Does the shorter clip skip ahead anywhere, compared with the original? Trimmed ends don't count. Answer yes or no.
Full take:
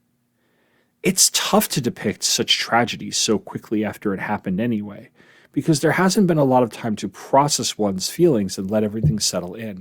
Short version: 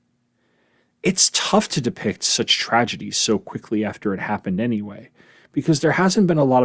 no